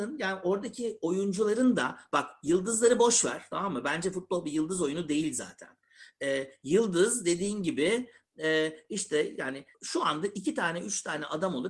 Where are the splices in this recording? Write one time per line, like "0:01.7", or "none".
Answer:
0:09.7

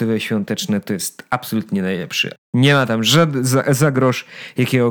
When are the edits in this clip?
0:02.4

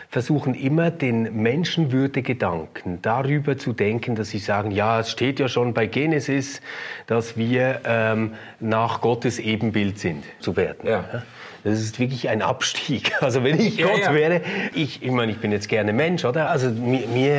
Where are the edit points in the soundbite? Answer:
0:10.4
0:14.7
0:16.5

